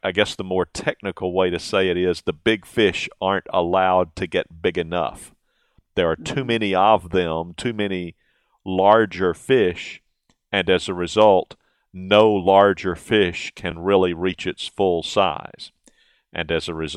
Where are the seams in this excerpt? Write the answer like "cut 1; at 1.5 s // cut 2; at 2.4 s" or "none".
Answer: none